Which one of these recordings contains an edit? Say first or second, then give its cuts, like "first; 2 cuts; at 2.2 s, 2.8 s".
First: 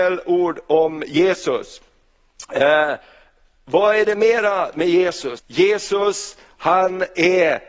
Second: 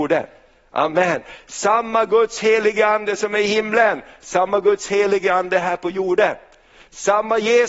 first; 1 cut; at 5.4 s